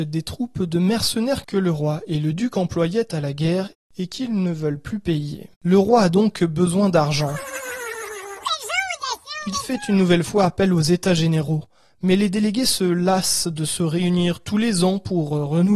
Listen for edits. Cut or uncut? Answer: cut